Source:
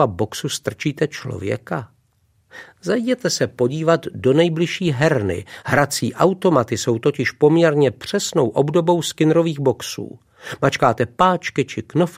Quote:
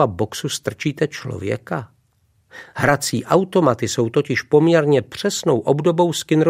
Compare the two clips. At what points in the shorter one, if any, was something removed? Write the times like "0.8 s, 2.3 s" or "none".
2.7 s